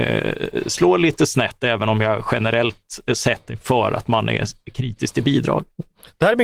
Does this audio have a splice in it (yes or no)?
no